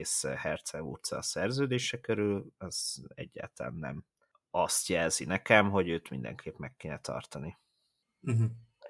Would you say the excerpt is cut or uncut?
uncut